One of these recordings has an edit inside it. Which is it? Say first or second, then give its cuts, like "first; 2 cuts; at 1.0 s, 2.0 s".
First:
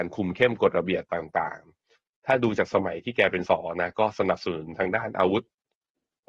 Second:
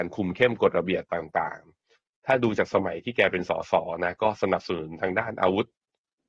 first; 1 cut; at 3.5 s